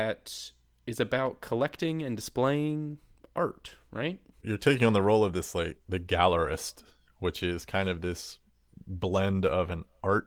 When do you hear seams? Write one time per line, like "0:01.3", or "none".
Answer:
0:04.4